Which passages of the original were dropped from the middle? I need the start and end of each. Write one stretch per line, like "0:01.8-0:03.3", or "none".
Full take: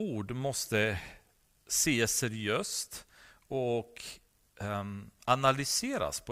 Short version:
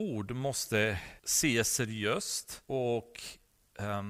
0:01.2-0:01.6
0:03.1-0:03.5